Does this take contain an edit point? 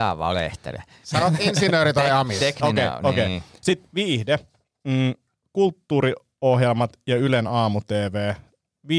no; 0 cuts

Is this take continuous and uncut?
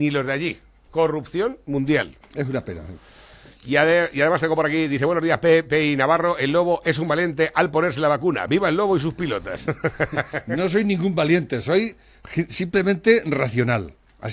yes; 0 cuts

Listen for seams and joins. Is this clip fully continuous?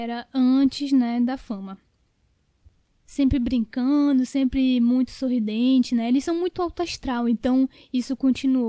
yes; 0 cuts

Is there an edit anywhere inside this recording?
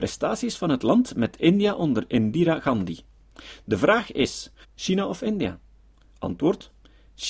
yes; 1 cut; at 4.6 s

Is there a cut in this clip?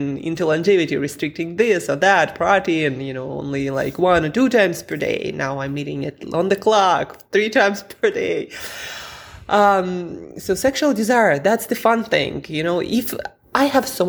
no; 0 cuts

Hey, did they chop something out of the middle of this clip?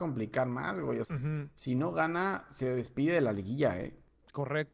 yes; 1 cut; at 1.0 s

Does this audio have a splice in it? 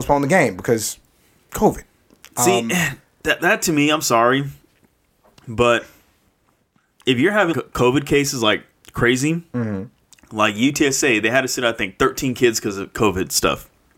yes; 1 cut; at 7.5 s

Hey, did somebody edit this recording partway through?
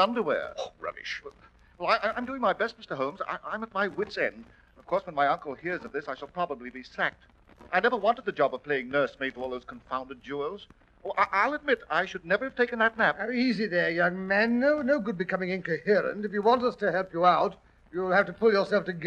no; 0 cuts

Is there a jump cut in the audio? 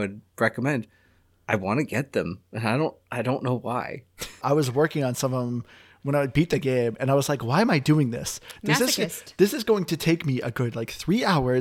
yes; 1 cut; at 4.4 s

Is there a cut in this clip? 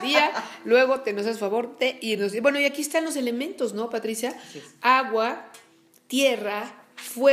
no; 0 cuts

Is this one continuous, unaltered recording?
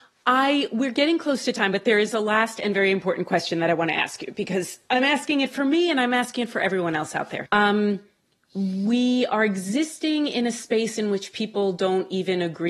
no; 1 cut; at 7.5 s

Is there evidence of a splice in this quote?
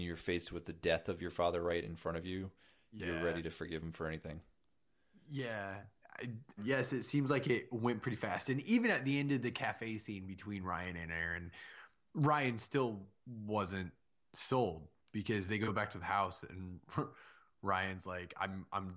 yes; 1 cut; at 6.6 s

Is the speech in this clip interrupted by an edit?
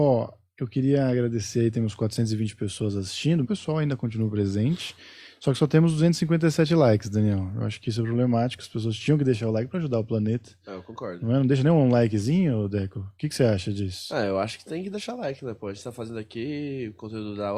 yes; 1 cut; at 3.4 s

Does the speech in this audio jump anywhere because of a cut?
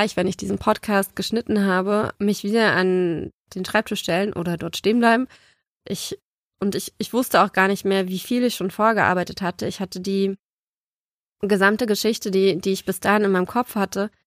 yes; 1 cut; at 5.8 s

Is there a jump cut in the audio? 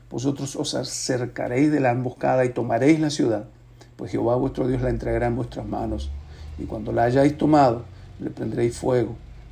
no; 0 cuts

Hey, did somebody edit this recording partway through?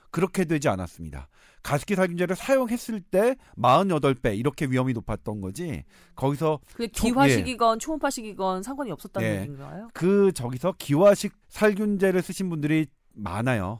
yes; 2 cuts; at 9.9 s, 11.4 s

